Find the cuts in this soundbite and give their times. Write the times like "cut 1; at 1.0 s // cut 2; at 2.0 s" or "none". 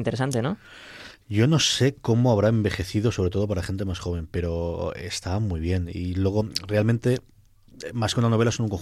none